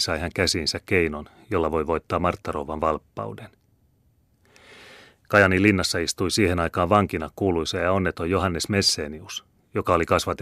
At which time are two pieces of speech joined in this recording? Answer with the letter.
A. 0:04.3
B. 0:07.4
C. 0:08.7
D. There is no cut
D